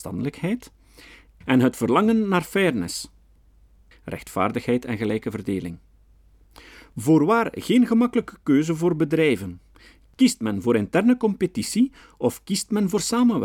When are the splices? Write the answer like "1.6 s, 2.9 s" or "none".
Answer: 3.9 s